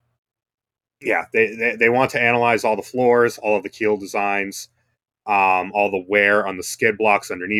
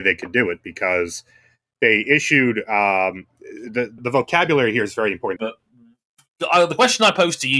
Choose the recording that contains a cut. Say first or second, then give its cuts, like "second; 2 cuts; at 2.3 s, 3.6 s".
second; 2 cuts; at 4.0 s, 5.4 s